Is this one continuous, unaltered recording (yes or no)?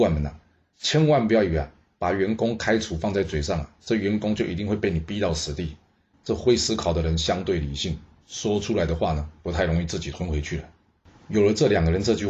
no